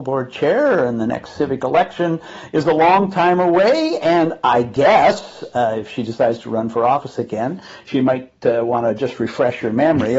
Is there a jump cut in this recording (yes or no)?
no